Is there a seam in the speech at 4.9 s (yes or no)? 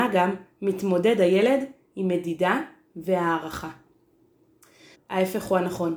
yes